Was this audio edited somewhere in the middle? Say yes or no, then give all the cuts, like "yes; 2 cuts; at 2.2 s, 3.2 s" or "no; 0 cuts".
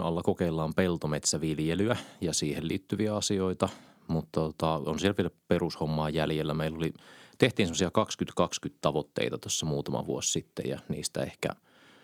no; 0 cuts